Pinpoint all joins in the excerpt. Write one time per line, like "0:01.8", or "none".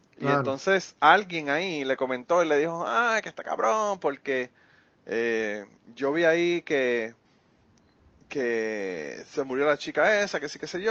none